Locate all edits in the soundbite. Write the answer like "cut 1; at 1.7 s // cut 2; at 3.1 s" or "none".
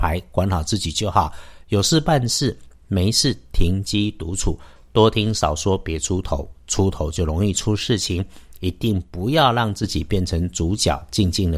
none